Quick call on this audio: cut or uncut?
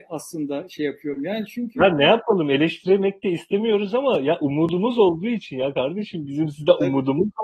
uncut